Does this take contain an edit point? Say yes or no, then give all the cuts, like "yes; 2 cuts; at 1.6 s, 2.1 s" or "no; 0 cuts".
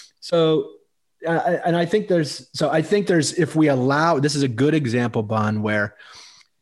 no; 0 cuts